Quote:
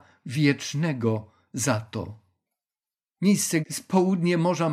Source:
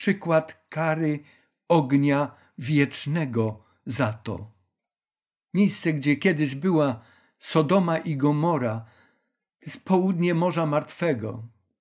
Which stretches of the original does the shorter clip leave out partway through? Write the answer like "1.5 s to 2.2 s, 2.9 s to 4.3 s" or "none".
5.9 s to 9.6 s